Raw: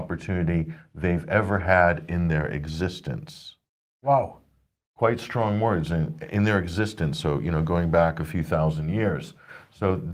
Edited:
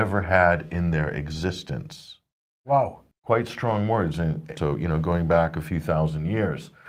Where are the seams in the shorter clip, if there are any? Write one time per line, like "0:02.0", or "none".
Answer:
0:03.1
0:04.6